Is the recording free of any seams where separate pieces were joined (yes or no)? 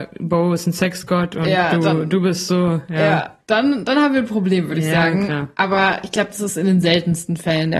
yes